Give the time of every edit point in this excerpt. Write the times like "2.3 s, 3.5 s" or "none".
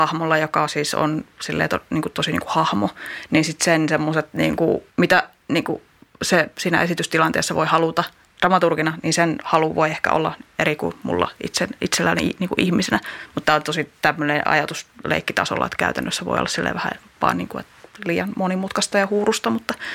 4.9 s